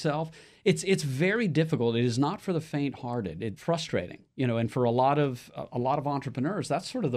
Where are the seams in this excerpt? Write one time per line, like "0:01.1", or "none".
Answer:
0:03.6